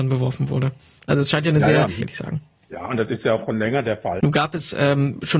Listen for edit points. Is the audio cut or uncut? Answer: cut